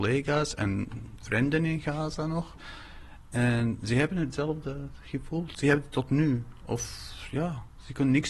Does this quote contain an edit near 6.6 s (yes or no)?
no